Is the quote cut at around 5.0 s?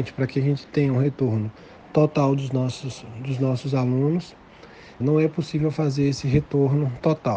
yes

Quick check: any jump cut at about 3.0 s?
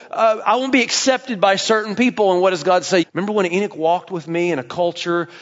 yes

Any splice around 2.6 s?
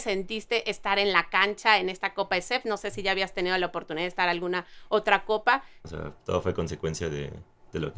no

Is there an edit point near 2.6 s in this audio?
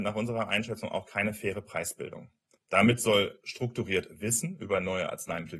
yes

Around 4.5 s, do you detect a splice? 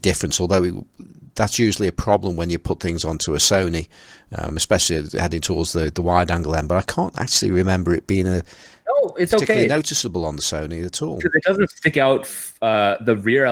no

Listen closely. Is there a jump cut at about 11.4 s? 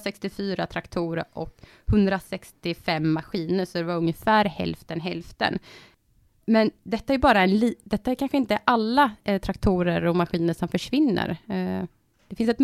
no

